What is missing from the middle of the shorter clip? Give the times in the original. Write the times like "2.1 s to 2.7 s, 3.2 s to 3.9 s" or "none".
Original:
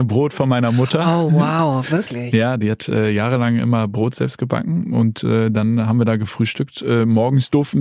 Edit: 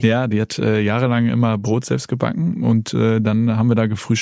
none